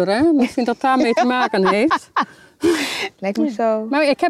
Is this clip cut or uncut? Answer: cut